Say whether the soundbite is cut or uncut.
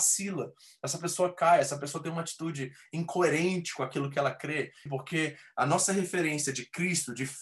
cut